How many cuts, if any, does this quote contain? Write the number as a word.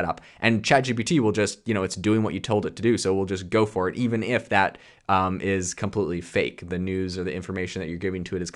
zero